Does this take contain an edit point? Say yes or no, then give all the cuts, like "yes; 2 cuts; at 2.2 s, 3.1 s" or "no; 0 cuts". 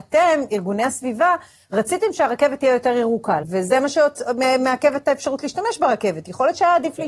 yes; 1 cut; at 3.4 s